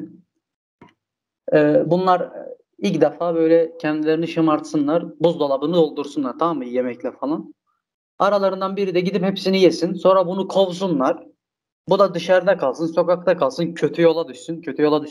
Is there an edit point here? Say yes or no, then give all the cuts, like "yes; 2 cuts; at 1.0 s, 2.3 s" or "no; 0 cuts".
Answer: no; 0 cuts